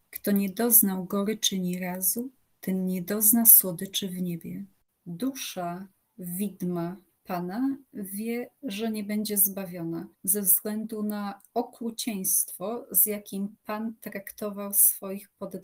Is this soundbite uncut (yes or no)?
no